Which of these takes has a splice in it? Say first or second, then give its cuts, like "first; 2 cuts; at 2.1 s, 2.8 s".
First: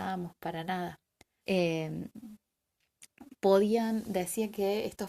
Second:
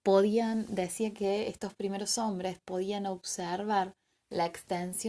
first; 1 cut; at 1.4 s